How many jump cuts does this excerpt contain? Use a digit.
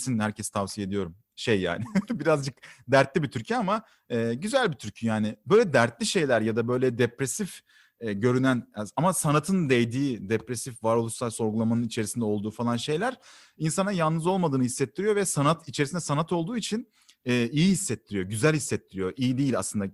0